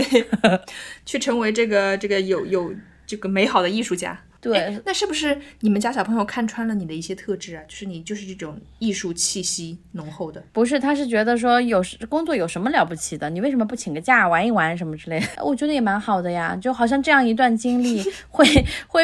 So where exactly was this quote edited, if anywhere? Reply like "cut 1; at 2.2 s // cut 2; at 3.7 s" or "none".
cut 1; at 10.5 s // cut 2; at 15.4 s